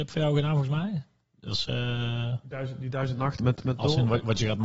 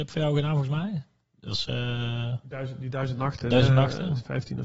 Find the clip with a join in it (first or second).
first